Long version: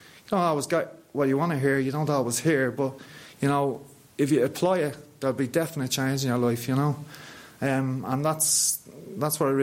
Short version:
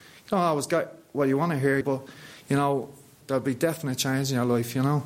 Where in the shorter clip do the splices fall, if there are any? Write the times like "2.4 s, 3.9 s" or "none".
1.8 s, 3.2 s